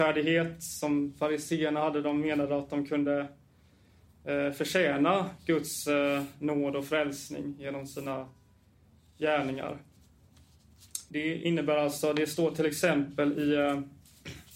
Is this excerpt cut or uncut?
cut